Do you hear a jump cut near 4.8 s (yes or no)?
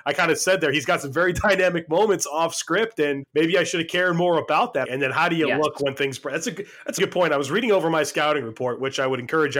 yes